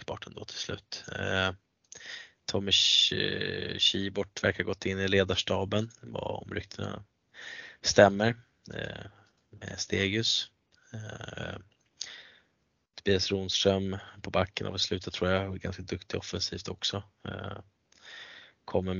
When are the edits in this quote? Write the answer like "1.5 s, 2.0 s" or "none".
2.3 s